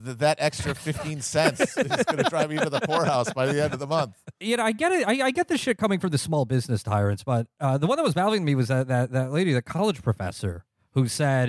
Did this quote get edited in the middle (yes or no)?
yes